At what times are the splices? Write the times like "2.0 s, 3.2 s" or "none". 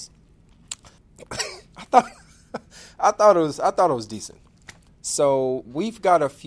1.0 s, 4.9 s